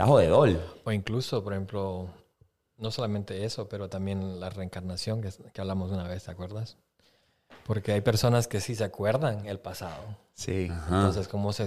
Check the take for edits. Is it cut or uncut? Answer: uncut